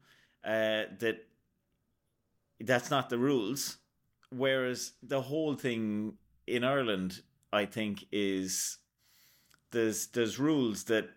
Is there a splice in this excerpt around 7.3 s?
no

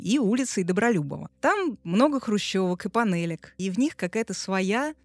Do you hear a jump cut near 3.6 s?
yes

